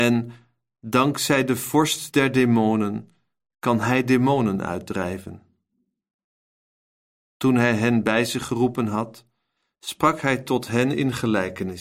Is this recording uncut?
yes; 0 cuts

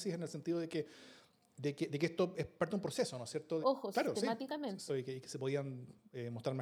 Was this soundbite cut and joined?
yes; 2 cuts; at 3.6 s, 4.9 s

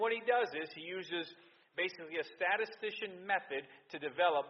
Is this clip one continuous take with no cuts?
yes; 0 cuts

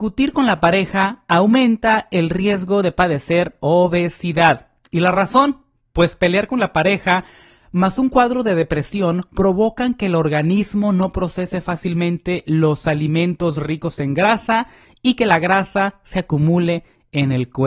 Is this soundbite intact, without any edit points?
yes; 0 cuts

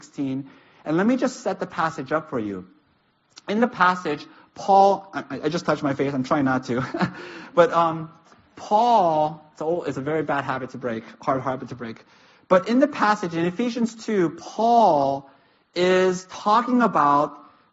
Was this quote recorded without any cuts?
yes; 0 cuts

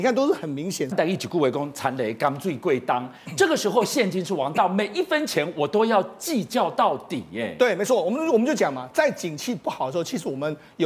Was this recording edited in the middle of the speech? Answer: no; 0 cuts

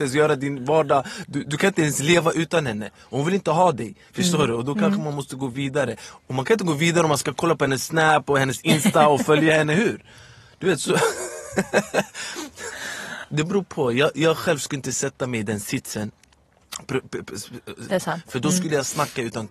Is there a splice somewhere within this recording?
yes; 2 cuts; at 13.2 s, 17.9 s

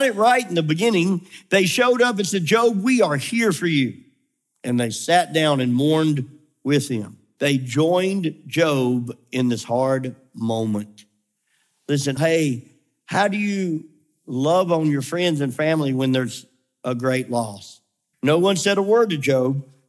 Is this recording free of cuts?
no; 3 cuts; at 7.4 s, 12.2 s, 18.1 s

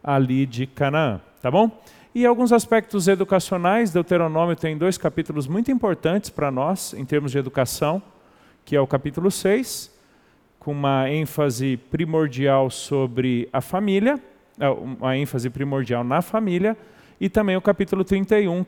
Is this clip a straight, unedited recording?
yes; 0 cuts

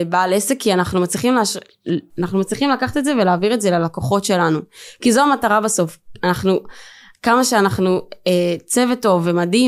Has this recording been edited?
no; 0 cuts

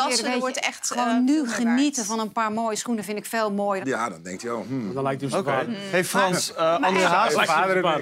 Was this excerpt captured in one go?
no; 1 cut; at 3.8 s

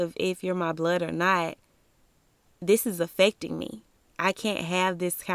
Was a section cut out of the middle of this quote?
no; 0 cuts

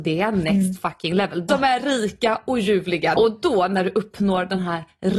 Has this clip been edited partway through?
yes; 2 cuts; at 1.5 s, 3.2 s

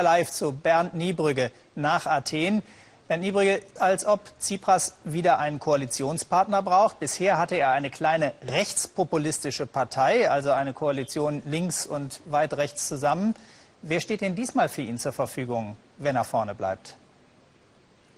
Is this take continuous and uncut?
no; 1 cut; at 3.8 s

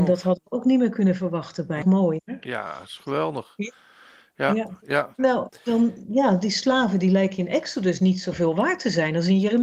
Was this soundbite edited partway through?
yes; 1 cut; at 1.8 s

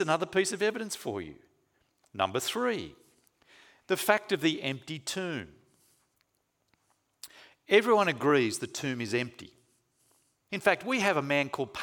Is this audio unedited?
no; 1 cut; at 10.5 s

